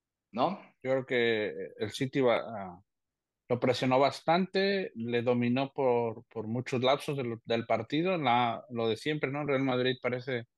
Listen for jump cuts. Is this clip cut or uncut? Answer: uncut